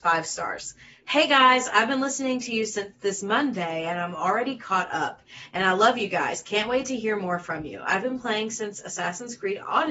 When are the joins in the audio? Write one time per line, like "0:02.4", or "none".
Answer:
none